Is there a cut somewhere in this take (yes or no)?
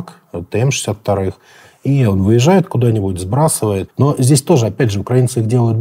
yes